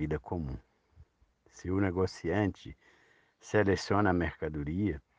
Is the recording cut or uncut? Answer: uncut